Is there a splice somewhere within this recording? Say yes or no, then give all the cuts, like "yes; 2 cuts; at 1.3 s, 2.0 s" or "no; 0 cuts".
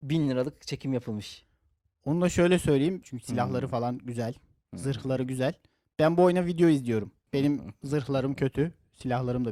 yes; 2 cuts; at 3.0 s, 7.3 s